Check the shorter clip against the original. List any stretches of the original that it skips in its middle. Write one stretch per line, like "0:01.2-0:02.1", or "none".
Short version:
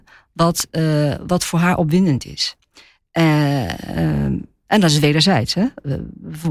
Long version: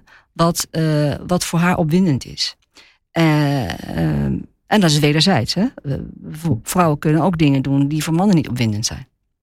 none